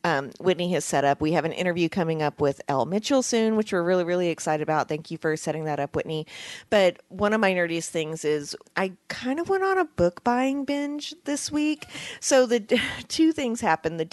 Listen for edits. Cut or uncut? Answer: uncut